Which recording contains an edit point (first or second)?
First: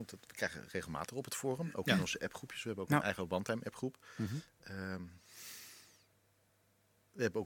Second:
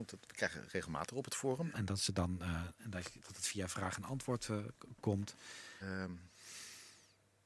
second